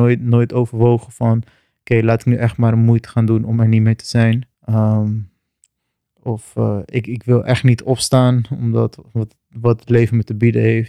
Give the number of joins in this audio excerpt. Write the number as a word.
one